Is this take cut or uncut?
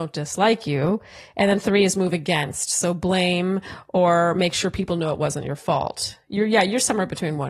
uncut